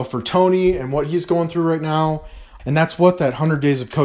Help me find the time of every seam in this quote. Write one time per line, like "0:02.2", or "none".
0:02.6